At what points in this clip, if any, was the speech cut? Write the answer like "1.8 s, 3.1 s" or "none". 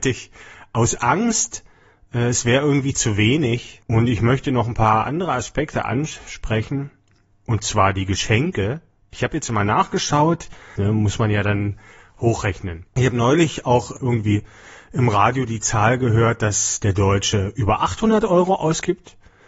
3.8 s, 10.8 s, 12.9 s